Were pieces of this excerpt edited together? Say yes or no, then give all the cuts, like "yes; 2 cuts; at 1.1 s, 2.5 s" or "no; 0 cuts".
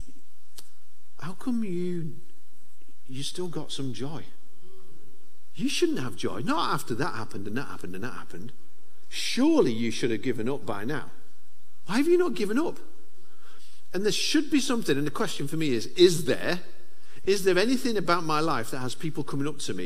no; 0 cuts